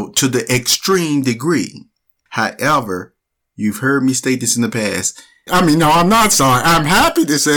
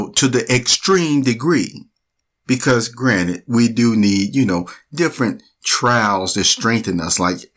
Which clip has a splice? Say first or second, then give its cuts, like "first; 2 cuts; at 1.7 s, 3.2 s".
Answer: first; 2 cuts; at 2.3 s, 5.5 s